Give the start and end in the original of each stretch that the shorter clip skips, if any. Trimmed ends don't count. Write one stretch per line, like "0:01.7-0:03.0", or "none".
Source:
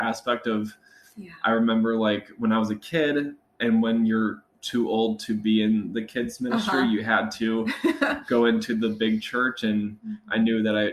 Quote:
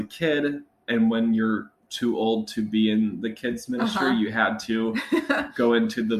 none